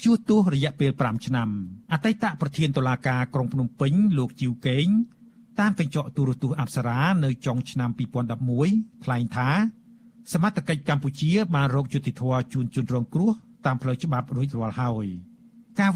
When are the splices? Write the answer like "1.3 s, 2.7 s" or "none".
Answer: 1.8 s

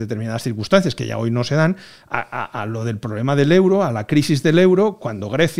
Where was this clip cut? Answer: none

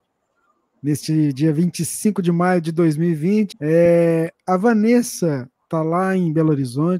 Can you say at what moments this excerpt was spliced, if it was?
3.5 s

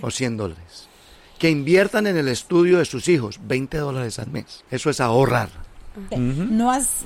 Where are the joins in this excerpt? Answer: 4.7 s, 6.1 s

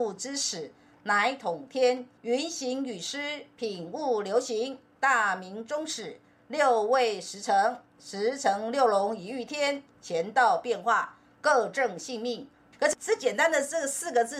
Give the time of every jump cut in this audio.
2.2 s, 12.7 s

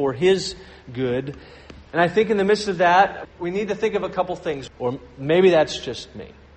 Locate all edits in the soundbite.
3.2 s, 4.7 s

